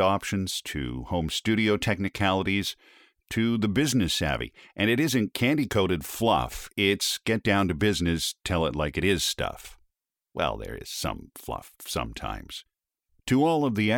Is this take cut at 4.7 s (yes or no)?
no